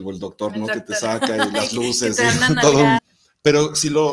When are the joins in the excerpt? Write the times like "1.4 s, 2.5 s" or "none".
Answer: 3.0 s